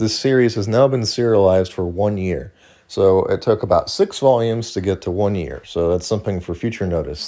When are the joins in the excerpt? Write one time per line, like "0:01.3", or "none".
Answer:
none